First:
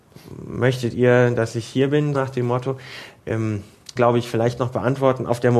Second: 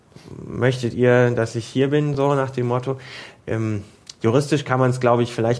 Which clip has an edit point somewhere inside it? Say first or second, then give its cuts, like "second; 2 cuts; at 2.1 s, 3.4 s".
first; 2 cuts; at 2.1 s, 4.0 s